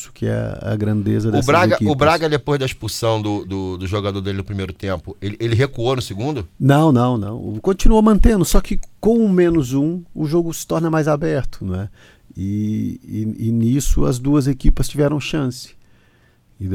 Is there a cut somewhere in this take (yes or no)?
yes